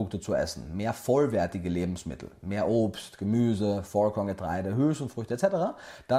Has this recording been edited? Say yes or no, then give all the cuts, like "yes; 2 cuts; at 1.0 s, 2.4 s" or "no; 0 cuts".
no; 0 cuts